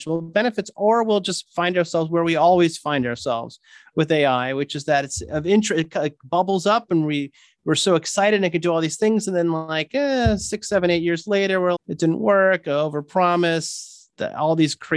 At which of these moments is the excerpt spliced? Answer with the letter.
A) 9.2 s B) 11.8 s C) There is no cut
B